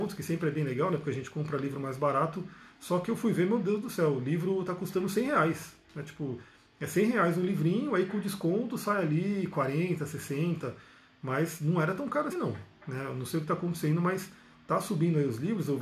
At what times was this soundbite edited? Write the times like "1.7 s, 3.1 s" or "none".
12.3 s